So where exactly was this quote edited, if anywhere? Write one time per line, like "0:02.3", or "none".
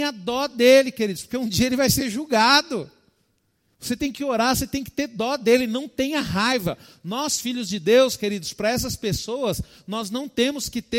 none